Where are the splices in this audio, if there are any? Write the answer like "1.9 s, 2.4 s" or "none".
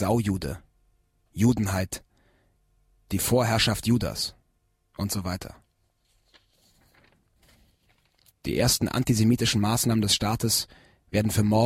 none